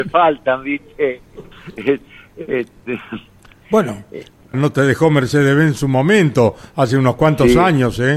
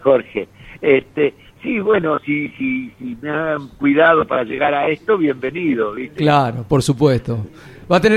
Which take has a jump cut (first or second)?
first